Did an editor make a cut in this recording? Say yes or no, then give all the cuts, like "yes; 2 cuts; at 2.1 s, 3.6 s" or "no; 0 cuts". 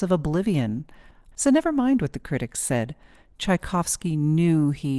yes; 1 cut; at 1.3 s